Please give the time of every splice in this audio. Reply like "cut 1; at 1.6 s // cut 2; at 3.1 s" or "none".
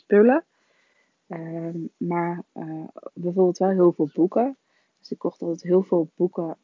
none